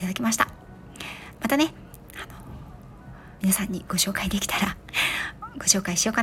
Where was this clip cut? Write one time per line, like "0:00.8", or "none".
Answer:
0:01.4
0:03.4

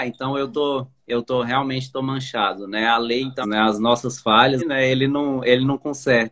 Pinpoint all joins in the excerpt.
0:03.4
0:04.6

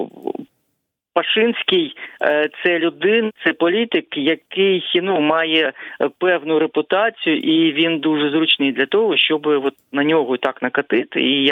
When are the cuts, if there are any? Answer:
0:03.4

